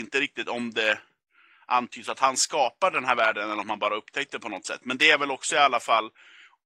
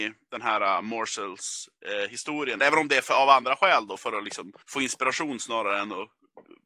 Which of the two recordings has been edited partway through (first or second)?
second